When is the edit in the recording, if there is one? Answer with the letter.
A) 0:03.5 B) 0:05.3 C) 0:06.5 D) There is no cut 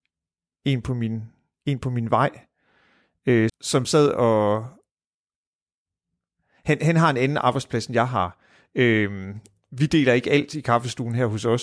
A